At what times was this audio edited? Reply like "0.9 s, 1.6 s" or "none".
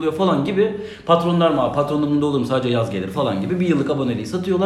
none